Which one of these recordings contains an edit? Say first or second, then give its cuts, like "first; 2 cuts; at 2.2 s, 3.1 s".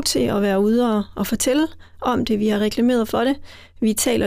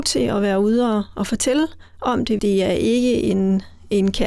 second; 1 cut; at 2.4 s